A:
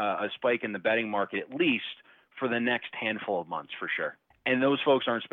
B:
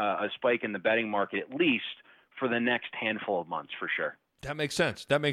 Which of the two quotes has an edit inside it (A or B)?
A